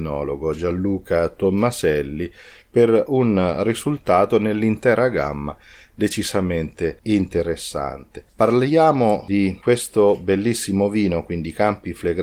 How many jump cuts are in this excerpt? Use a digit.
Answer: 1